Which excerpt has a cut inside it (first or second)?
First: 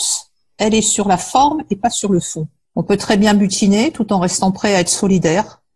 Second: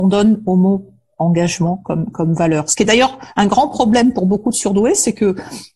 first